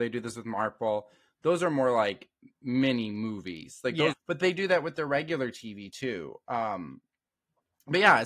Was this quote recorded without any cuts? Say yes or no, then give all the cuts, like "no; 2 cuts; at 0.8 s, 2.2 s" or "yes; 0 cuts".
no; 1 cut; at 4.1 s